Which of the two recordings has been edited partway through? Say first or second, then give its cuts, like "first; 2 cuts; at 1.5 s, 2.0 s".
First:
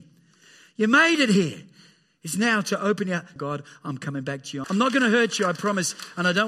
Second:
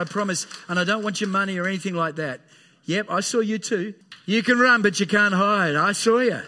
first; 2 cuts; at 3.4 s, 4.6 s